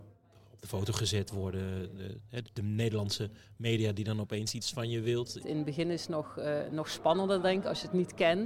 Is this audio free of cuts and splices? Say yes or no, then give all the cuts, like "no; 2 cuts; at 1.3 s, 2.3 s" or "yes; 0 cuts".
no; 2 cuts; at 2.4 s, 5.4 s